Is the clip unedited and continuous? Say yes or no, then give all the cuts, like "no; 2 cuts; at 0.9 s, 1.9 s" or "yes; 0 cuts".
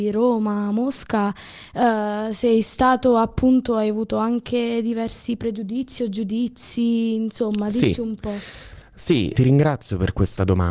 yes; 0 cuts